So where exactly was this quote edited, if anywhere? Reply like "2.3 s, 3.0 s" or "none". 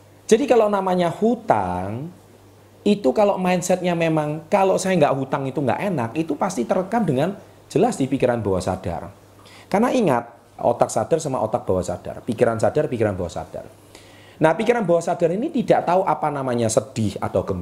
10.6 s